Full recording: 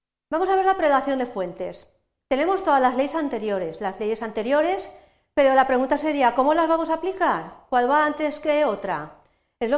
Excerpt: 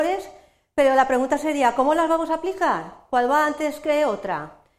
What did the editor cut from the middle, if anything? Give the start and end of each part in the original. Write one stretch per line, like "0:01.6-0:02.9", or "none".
none